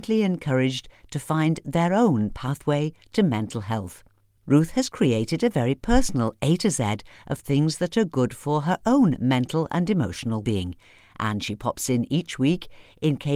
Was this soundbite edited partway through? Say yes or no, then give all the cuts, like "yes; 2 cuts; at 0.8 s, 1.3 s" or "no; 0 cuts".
yes; 1 cut; at 10.4 s